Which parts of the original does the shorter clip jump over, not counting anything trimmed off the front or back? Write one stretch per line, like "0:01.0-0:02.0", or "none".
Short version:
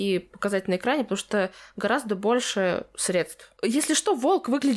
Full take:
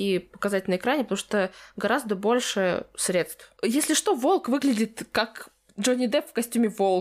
none